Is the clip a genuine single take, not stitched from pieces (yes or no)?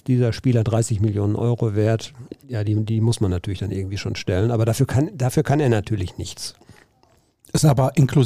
no